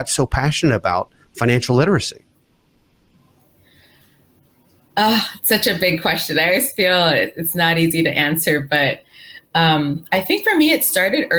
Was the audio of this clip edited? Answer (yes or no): no